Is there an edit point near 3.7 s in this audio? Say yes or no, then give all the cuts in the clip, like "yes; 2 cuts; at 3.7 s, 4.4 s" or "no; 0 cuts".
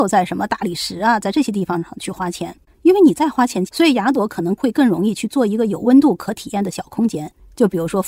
yes; 1 cut; at 3.7 s